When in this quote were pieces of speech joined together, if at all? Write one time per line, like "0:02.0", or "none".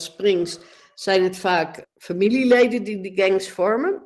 0:01.8